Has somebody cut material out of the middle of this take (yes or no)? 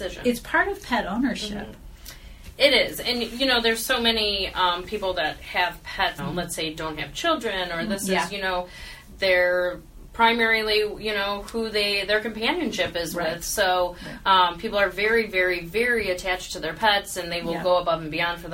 yes